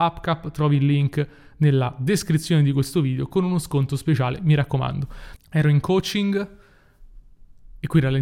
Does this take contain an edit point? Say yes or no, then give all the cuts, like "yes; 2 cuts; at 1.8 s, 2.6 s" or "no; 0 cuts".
yes; 1 cut; at 5.4 s